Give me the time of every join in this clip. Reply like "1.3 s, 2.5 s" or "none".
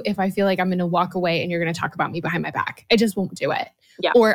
none